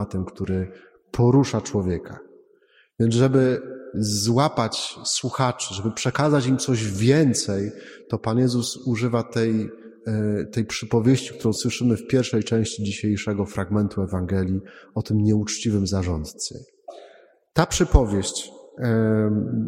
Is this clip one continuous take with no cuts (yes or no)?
no